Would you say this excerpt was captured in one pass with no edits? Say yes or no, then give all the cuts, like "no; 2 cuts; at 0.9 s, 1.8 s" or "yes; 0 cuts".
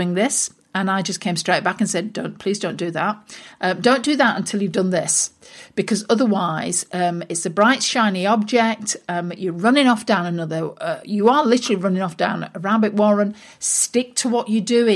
yes; 0 cuts